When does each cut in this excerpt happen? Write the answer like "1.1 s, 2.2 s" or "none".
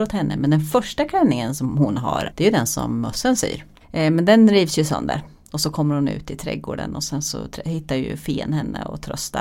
2.3 s, 3.8 s